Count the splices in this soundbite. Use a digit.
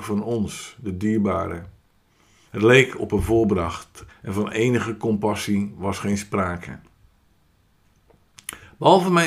2